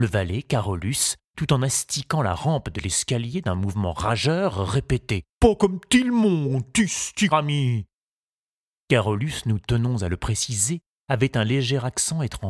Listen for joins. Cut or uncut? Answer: cut